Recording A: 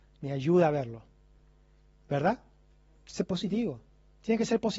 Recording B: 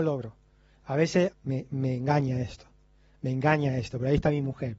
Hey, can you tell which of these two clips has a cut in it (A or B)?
B